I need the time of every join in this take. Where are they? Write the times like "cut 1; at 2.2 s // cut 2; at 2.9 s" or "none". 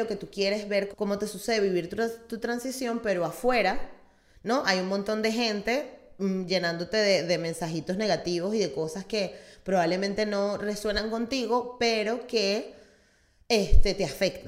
cut 1; at 0.9 s